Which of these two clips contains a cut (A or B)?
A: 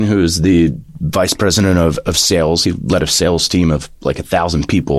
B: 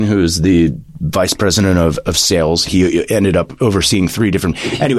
B